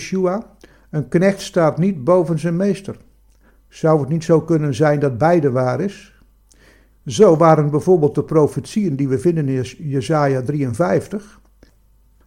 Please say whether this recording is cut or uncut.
cut